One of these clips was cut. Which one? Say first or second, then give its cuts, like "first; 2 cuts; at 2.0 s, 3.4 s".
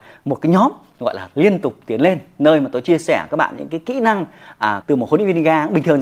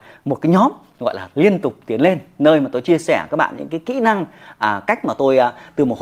first; 1 cut; at 4.8 s